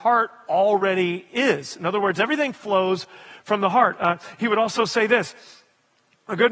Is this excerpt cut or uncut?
uncut